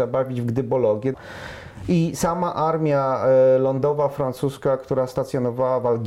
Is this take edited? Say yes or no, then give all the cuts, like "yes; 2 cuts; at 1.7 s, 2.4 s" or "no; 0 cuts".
yes; 1 cut; at 1.1 s